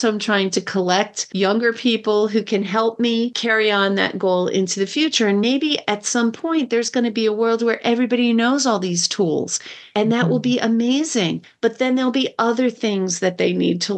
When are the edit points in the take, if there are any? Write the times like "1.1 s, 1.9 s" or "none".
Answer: none

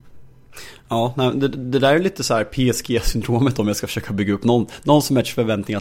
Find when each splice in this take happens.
none

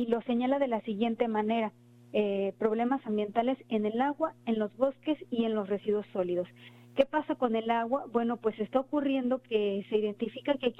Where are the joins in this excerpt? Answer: none

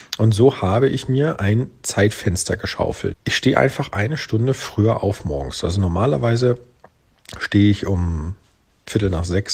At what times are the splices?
3.1 s

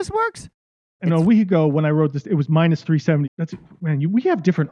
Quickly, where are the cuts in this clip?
1.0 s, 3.2 s

